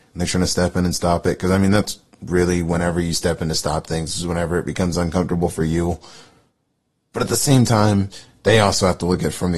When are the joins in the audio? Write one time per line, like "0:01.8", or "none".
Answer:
none